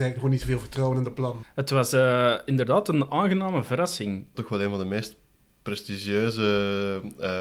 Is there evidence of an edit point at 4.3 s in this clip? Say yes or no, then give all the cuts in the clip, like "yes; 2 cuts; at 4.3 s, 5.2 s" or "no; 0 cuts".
yes; 2 cuts; at 1.4 s, 4.3 s